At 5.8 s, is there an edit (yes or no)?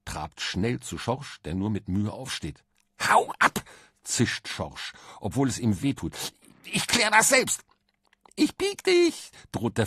yes